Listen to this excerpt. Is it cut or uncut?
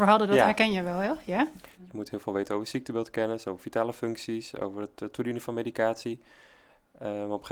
cut